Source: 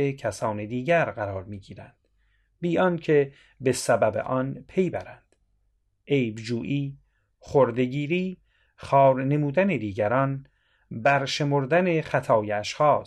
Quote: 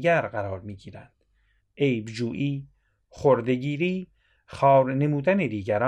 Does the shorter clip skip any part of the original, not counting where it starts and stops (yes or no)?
yes